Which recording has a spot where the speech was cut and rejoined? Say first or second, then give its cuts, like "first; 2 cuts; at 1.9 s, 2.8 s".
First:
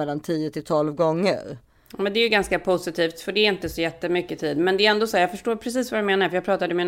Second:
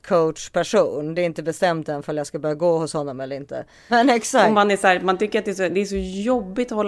second; 1 cut; at 3.9 s